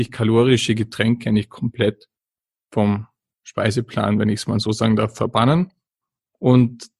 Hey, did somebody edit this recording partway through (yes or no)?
no